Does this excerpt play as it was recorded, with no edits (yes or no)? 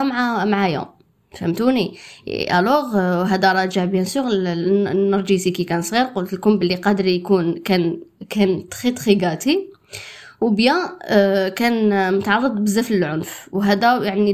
yes